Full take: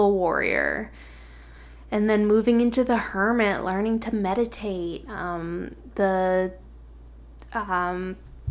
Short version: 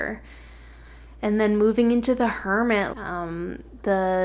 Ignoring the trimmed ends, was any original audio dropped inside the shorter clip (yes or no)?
yes